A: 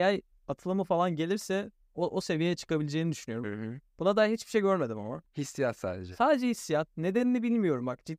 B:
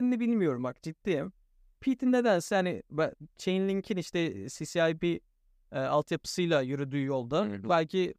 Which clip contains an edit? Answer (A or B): A